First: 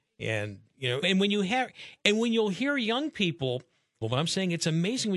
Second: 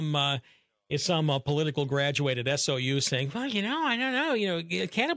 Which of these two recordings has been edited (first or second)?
first